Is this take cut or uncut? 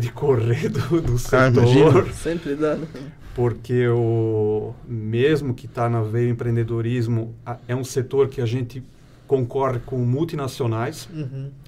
uncut